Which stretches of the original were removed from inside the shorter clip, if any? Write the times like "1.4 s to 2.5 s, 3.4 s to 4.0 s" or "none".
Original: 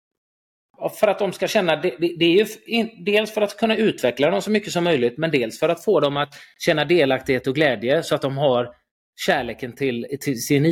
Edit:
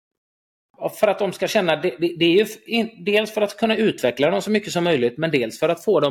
none

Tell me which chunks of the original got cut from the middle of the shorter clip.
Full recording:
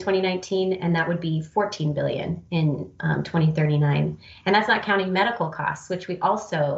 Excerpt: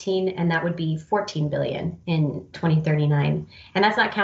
3.0 s to 3.2 s

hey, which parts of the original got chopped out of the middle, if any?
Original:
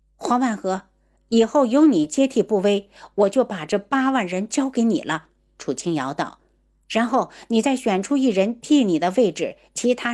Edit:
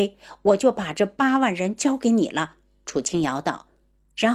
none

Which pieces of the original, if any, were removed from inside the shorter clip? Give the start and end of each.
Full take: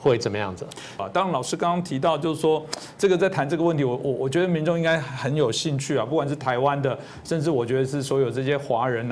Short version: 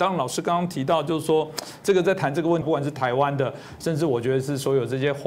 3.8 s to 6.1 s

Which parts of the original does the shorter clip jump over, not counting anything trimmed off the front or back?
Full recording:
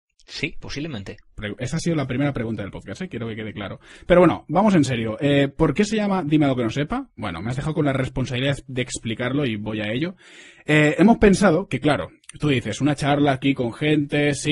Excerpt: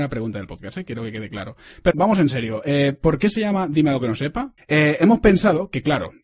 4.1 s to 4.5 s, 7.1 s to 10.6 s

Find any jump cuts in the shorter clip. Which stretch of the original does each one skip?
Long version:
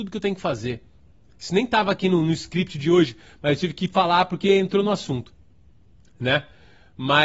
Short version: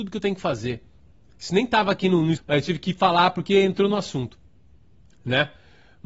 2.4 s to 3.3 s

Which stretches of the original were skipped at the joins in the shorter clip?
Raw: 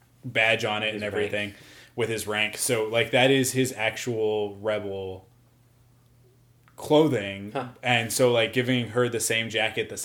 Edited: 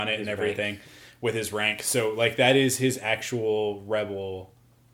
none

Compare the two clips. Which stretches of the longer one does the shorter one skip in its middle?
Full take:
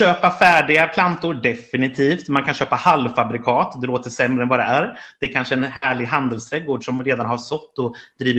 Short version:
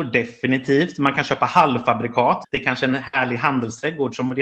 3.7 s to 5.1 s

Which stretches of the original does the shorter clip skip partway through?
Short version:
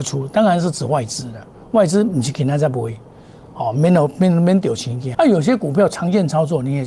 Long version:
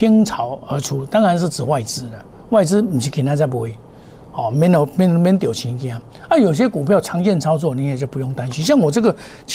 5.9 s to 6.3 s

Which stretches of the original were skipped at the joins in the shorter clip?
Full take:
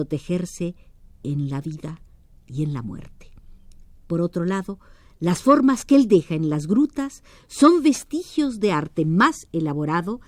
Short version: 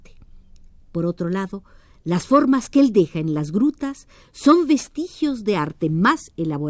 none

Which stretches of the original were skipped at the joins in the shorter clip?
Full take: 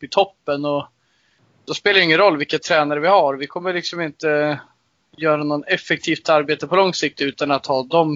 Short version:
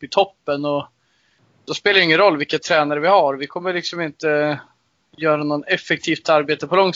none

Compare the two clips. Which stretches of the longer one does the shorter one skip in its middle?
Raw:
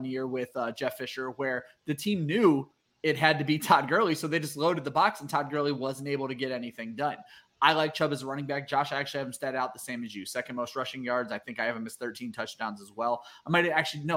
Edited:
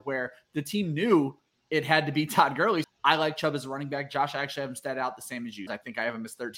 4.2 s to 7.4 s, 10.2 s to 11.3 s

